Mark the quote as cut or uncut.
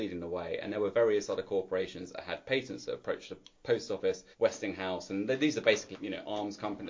cut